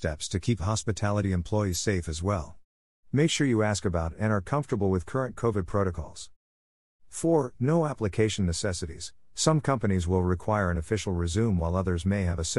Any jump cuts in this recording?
no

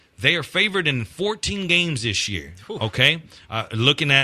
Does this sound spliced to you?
no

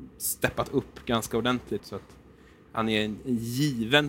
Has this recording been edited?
yes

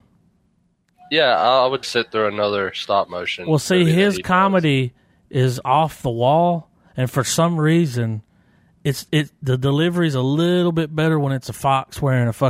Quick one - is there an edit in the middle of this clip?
yes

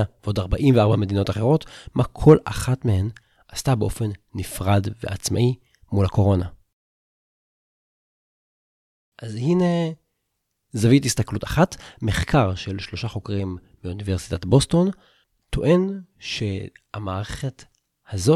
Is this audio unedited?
yes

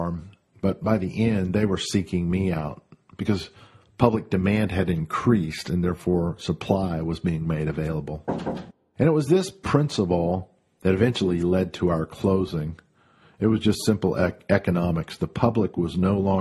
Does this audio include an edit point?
no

